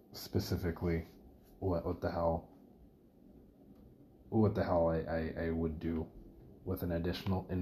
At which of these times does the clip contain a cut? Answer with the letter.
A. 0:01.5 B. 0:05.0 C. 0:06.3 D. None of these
D